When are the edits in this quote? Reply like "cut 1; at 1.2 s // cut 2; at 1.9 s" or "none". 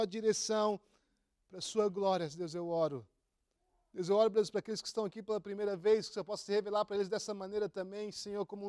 none